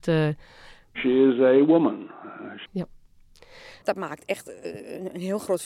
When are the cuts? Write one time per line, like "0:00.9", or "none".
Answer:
0:02.7
0:03.8